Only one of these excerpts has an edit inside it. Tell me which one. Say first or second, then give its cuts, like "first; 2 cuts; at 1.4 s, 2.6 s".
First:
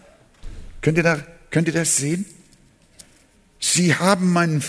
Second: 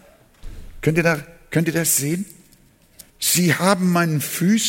second; 1 cut; at 3.1 s